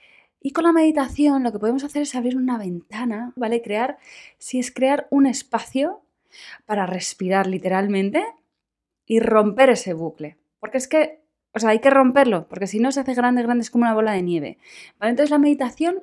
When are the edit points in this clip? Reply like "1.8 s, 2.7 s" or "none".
3.4 s